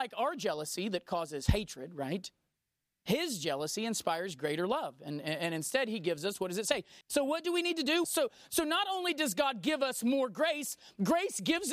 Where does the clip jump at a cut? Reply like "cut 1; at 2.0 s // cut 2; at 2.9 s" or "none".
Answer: cut 1; at 7.0 s // cut 2; at 8.0 s